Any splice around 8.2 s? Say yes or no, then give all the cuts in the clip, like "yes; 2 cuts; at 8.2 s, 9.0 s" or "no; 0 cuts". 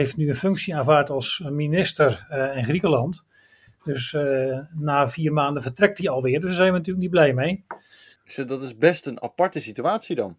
yes; 1 cut; at 8.2 s